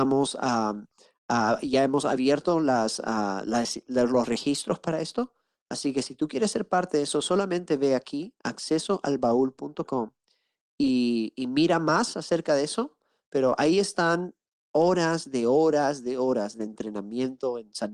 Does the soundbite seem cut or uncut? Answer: uncut